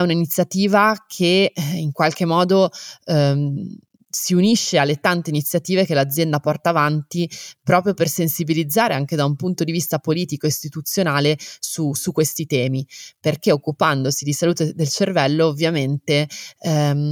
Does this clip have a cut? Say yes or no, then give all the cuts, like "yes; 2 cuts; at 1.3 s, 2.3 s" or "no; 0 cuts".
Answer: no; 0 cuts